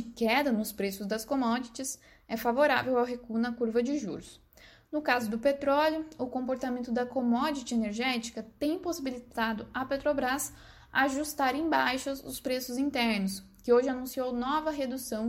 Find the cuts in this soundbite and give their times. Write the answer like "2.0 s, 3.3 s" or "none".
none